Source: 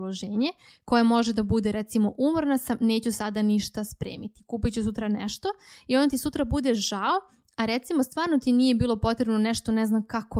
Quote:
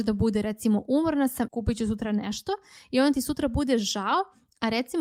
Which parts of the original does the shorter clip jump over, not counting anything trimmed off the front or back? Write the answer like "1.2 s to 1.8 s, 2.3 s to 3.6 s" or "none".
2.8 s to 4.4 s